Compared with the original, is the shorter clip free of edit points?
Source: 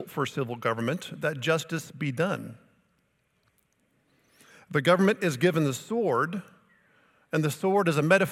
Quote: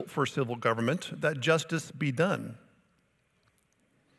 yes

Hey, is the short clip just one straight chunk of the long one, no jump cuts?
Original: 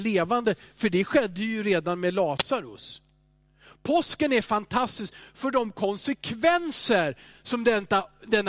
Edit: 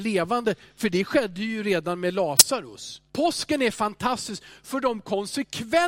no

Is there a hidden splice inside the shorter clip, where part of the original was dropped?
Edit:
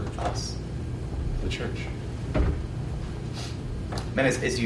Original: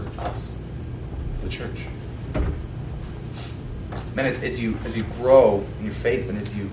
no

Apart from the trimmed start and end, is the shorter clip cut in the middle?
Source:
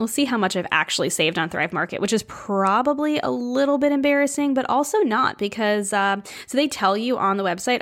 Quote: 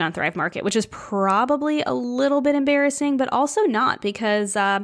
no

